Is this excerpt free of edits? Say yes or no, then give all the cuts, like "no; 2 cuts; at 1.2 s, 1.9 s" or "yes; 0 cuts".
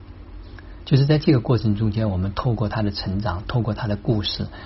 yes; 0 cuts